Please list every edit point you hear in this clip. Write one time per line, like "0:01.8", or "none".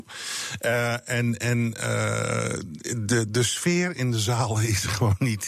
none

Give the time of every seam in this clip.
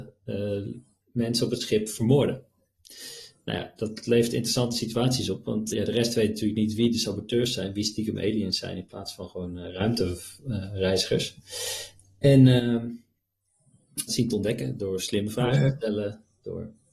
0:05.7
0:14.1

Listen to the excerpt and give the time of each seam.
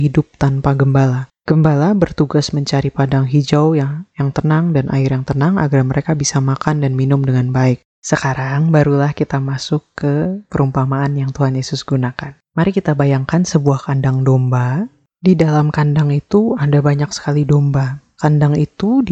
0:07.8

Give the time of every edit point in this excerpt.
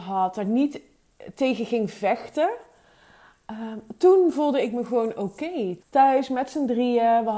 0:05.8

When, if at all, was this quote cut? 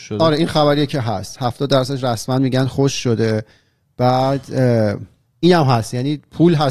0:05.3

